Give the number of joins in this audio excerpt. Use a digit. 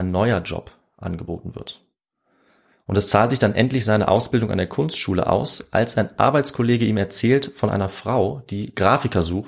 0